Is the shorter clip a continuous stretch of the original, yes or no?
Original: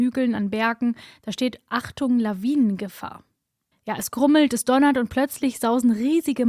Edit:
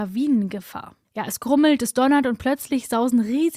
no